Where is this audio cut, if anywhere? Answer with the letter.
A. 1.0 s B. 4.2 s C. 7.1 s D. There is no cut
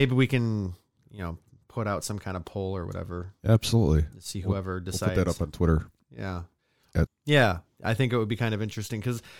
C